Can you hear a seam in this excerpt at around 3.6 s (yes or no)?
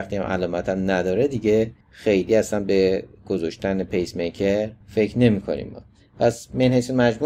no